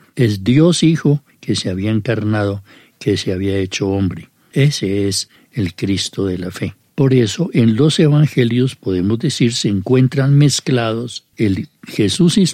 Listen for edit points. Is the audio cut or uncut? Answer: uncut